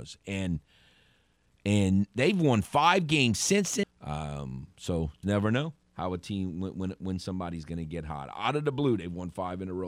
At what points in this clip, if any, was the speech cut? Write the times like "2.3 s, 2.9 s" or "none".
3.8 s, 5.2 s